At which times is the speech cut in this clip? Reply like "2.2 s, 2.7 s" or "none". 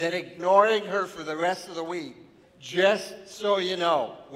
2.4 s